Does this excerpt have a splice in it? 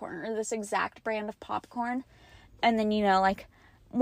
no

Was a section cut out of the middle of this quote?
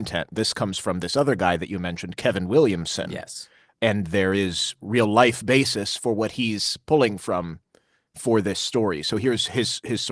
no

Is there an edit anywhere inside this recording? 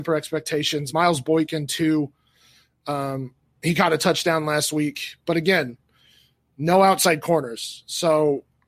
no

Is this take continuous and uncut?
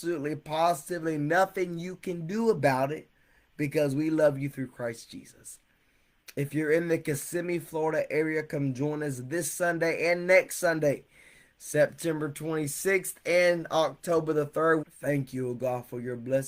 no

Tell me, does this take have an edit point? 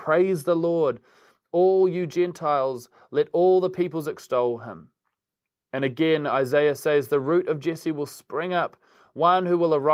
no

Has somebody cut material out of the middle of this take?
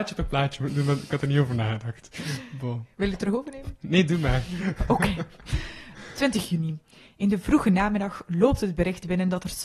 no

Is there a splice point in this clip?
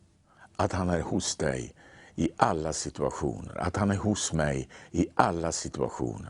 no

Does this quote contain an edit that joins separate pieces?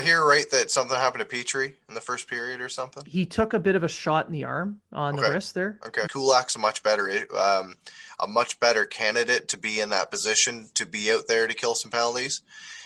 yes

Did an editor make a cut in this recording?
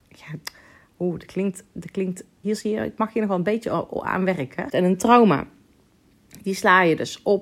yes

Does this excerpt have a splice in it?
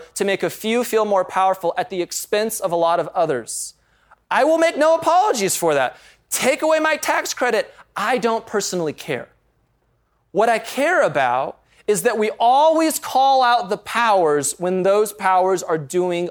no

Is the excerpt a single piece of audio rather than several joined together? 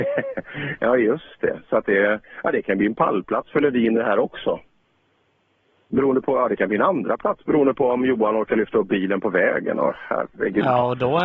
yes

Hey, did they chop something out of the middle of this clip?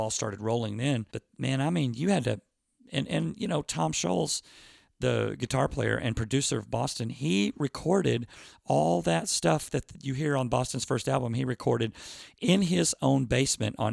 yes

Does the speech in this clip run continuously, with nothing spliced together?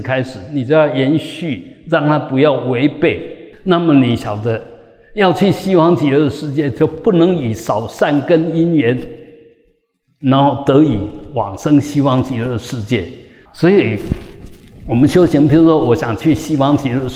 no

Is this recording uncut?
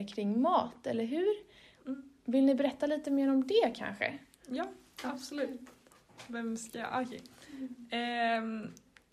yes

